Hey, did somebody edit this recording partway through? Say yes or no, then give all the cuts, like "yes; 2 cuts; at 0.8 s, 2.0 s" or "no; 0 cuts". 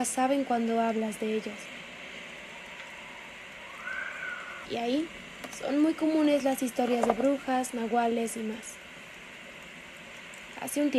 yes; 1 cut; at 4.6 s